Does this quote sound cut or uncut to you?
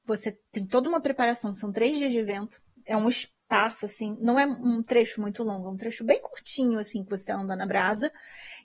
uncut